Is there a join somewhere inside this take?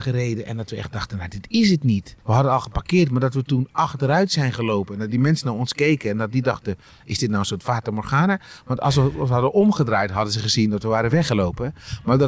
yes; 1 cut; at 2.2 s

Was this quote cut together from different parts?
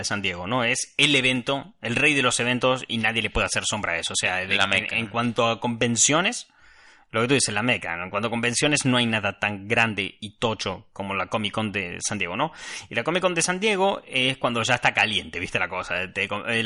no; 0 cuts

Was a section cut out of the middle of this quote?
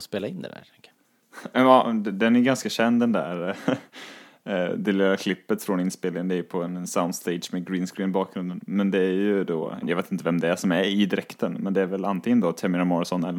yes; 1 cut; at 9.8 s

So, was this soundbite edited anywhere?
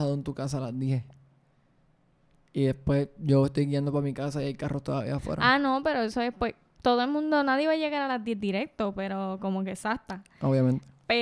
no; 0 cuts

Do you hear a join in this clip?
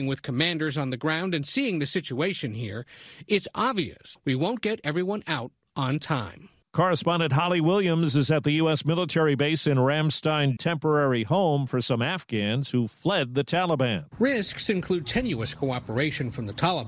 yes; 2 cuts; at 10.6 s, 14.1 s

